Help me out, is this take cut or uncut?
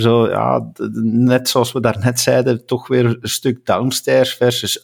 uncut